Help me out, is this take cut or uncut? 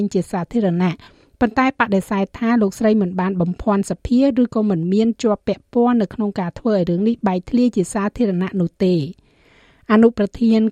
uncut